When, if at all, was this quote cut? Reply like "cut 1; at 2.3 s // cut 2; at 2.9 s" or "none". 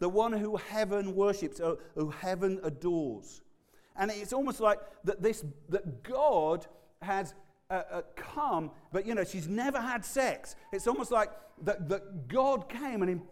none